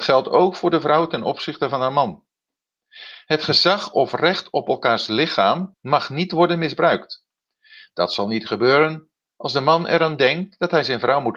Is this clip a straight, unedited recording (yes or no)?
no